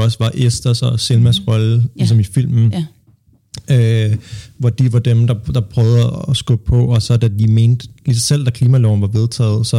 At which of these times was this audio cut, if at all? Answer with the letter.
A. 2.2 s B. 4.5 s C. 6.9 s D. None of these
D